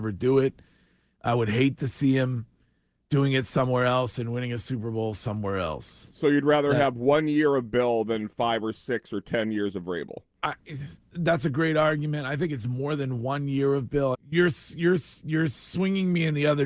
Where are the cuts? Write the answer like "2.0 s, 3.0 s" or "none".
14.1 s